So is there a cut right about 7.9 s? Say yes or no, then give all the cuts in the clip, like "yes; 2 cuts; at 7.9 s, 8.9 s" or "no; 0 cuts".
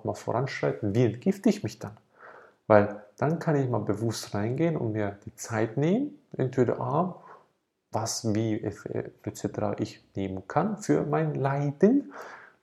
yes; 1 cut; at 7.9 s